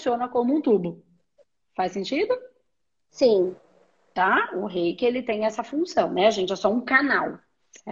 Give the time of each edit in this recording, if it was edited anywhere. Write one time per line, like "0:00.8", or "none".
none